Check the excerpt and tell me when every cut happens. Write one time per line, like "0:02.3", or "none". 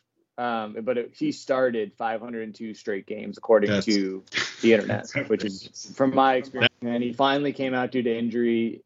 0:06.7